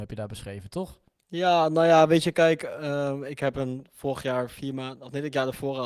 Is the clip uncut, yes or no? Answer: yes